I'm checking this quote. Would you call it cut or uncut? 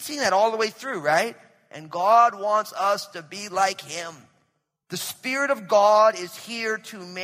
cut